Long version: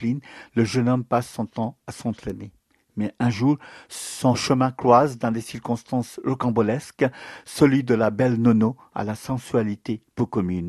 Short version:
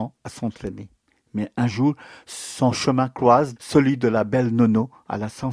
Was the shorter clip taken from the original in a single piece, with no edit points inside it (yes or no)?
no